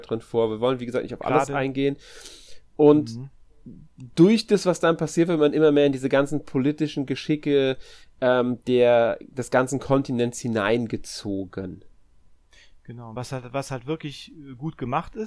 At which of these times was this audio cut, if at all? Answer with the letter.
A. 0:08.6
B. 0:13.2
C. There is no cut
C